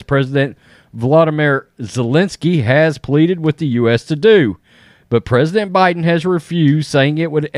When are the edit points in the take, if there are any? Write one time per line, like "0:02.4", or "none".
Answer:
none